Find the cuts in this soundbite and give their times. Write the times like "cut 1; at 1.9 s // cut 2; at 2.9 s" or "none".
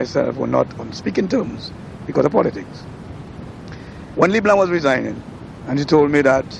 cut 1; at 5.6 s